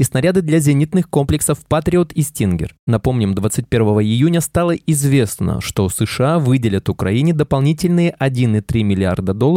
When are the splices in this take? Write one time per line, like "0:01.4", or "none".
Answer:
none